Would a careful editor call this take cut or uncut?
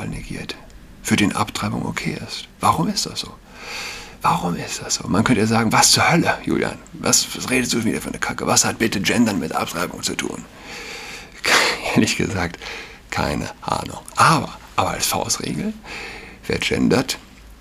uncut